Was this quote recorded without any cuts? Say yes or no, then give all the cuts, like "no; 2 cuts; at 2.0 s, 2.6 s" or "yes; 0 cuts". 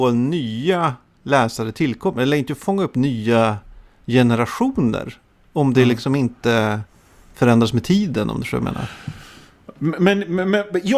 yes; 0 cuts